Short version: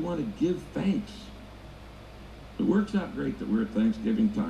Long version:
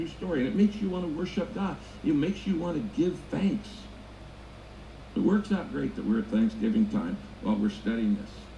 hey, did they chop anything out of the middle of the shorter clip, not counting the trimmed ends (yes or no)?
no